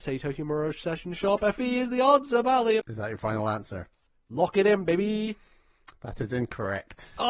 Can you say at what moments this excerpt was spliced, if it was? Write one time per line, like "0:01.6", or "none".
0:02.8